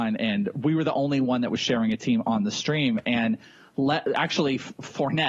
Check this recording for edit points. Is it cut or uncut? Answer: uncut